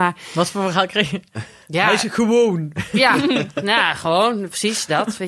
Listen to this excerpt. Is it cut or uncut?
uncut